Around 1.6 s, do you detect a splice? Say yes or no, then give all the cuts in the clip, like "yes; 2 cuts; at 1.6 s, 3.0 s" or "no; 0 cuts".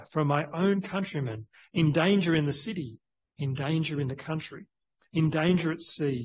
yes; 1 cut; at 1.6 s